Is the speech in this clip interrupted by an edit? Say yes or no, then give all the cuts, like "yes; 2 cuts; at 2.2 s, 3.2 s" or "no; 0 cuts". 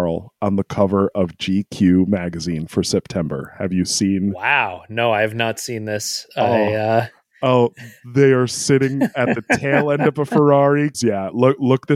yes; 1 cut; at 10.9 s